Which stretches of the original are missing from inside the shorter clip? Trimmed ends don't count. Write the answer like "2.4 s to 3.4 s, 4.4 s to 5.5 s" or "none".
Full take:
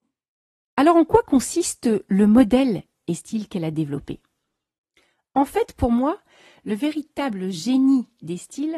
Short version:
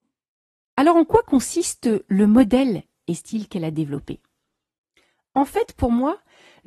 none